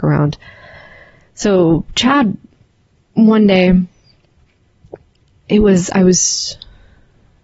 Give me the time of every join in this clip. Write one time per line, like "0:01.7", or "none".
none